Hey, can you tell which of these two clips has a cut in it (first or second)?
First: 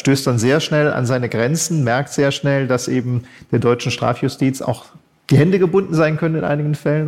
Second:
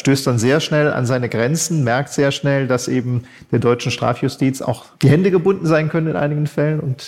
second